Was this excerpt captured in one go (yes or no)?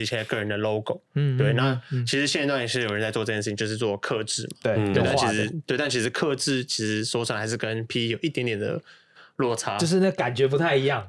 yes